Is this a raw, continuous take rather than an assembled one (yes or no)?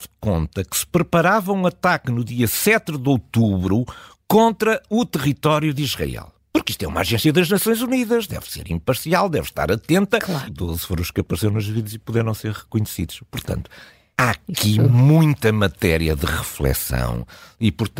no